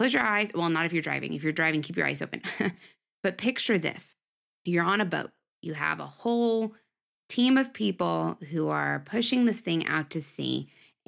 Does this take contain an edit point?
no; 0 cuts

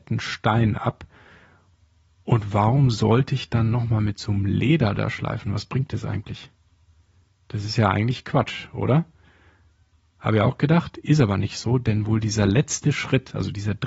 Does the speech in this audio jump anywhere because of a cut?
no; 0 cuts

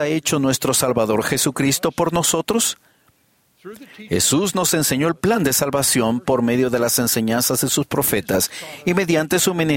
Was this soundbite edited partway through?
no; 0 cuts

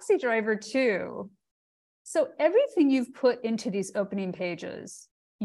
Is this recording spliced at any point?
no; 0 cuts

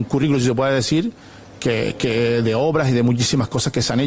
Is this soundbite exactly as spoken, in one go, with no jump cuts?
yes; 0 cuts

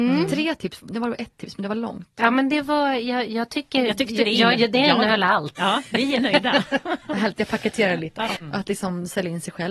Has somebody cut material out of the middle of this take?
yes; 3 cuts; at 4.5 s, 5.6 s, 8.3 s

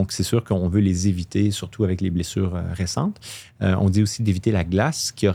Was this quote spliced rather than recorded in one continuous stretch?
no; 0 cuts

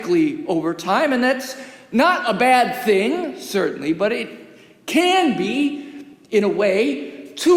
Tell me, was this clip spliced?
no; 0 cuts

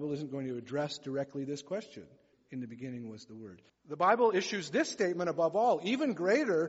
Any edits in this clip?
yes; 2 cuts; at 2.3 s, 3.7 s

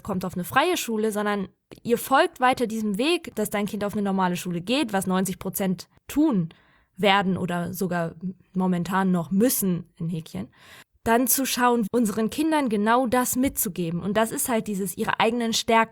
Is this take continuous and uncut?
no; 2 cuts; at 11.9 s, 14.0 s

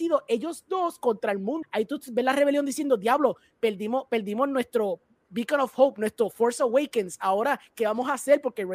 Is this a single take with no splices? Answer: no; 1 cut; at 1.6 s

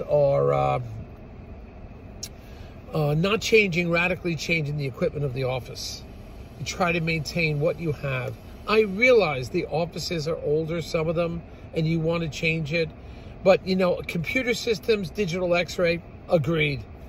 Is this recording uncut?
yes; 0 cuts

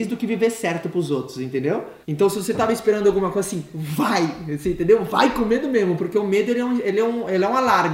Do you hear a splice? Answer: yes; 1 cut; at 2.0 s

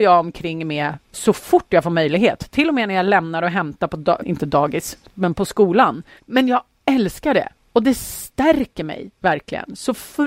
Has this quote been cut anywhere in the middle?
yes; 2 cuts; at 4.2 s, 6.2 s

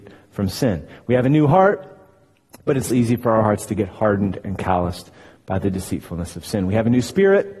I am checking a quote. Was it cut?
yes; 1 cut; at 2.9 s

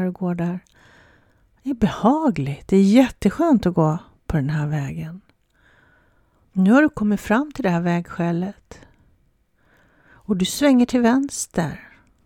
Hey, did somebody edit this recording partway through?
yes; 1 cut; at 6.4 s

